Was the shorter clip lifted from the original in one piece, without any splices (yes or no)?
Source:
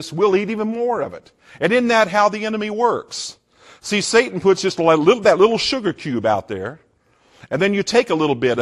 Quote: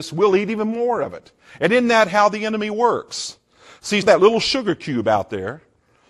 no